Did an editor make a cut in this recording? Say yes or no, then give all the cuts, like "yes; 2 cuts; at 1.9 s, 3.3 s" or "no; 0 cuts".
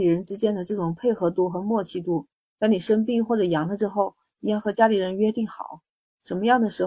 no; 0 cuts